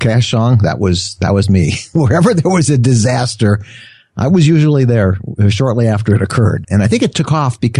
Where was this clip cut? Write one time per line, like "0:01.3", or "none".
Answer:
0:06.6